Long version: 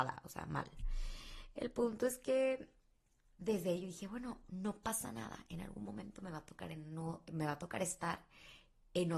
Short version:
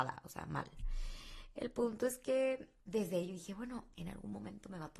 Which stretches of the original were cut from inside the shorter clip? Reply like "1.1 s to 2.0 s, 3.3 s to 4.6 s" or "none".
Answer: 2.8 s to 3.3 s, 4.5 s to 5.5 s